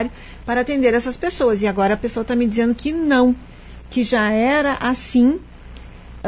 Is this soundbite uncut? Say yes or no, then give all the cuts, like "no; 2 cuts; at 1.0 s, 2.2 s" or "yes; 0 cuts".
yes; 0 cuts